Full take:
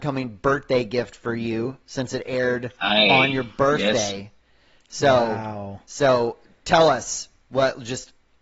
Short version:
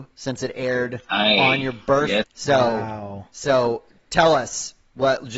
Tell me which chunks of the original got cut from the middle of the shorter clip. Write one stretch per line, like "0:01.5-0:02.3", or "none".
0:03.9-0:04.8